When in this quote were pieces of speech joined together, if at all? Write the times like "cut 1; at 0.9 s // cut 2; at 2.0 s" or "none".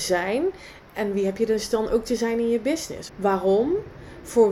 cut 1; at 3.1 s